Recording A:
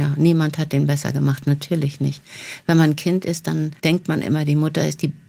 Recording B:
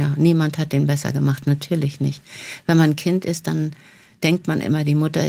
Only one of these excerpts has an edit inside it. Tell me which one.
A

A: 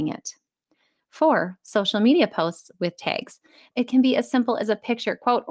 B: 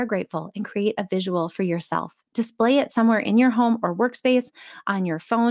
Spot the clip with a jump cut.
A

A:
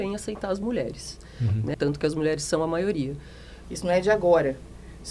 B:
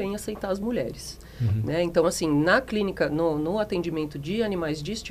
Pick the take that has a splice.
A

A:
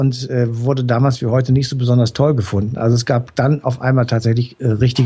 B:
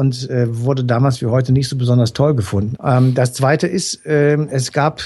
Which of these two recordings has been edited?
B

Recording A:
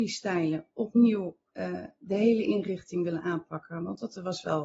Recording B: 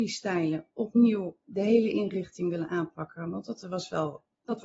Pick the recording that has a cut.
B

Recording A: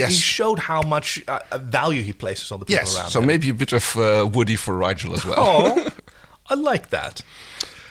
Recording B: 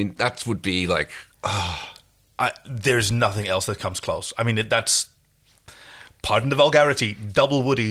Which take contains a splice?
B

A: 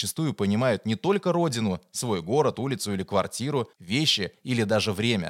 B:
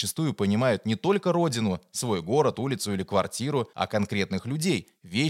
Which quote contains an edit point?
A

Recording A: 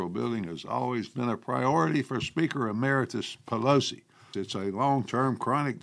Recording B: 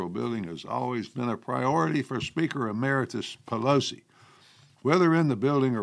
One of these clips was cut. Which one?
A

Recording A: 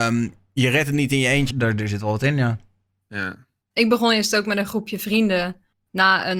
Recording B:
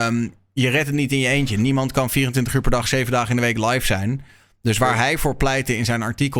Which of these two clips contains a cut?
A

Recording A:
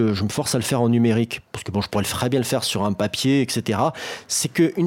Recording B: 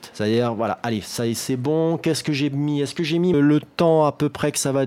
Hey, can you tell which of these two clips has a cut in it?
B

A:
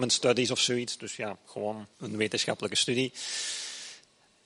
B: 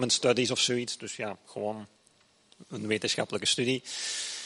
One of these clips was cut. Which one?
A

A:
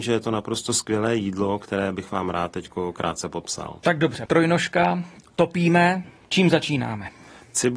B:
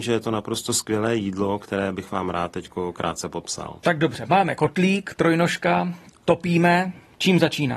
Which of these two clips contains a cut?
A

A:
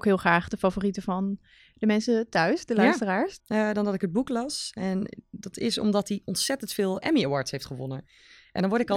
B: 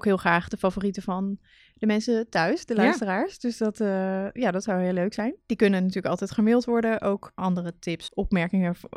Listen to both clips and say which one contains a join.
A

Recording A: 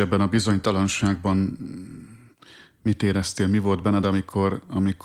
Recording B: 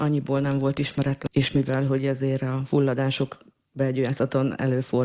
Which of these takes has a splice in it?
B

